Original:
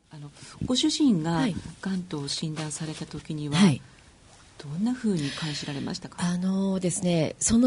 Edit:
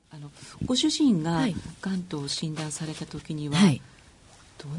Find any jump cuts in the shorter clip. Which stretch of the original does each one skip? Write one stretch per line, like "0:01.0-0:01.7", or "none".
none